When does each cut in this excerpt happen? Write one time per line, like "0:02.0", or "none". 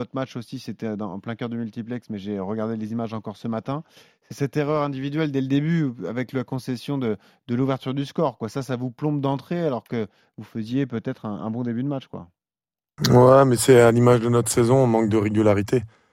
none